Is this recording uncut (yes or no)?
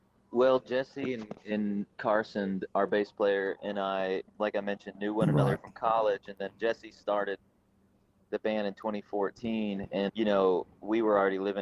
no